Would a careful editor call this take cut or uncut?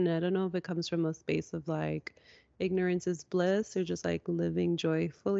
uncut